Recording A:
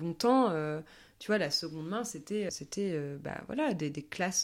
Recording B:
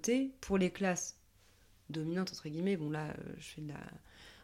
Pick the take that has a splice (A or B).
A